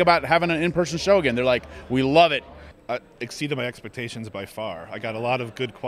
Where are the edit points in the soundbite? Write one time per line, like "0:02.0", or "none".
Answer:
0:02.7